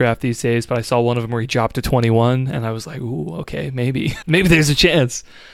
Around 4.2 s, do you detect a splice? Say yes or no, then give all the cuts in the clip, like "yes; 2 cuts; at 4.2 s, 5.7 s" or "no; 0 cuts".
yes; 1 cut; at 4.2 s